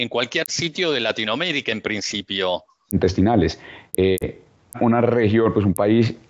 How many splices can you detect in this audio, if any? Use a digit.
2